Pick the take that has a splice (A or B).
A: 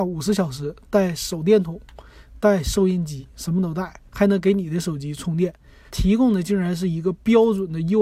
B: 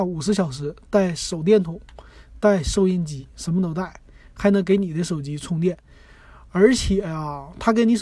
A